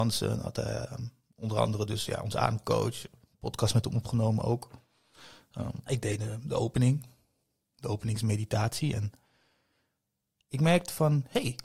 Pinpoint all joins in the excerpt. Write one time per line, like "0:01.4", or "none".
0:05.9